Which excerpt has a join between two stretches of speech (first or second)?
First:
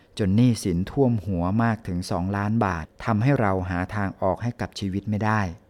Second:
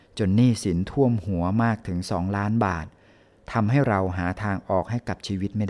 first